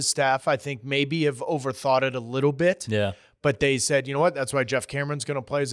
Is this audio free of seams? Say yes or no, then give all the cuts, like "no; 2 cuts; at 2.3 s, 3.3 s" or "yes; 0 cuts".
yes; 0 cuts